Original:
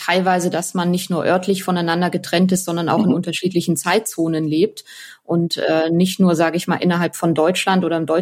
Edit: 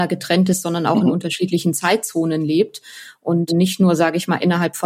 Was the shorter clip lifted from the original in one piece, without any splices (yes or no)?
no